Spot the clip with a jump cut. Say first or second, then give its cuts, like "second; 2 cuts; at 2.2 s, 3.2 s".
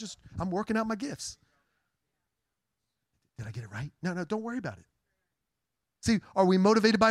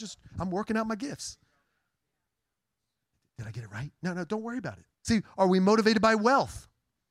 second; 1 cut; at 4.9 s